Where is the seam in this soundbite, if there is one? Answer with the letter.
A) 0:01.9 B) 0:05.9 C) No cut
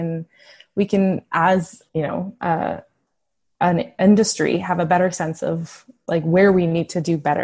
A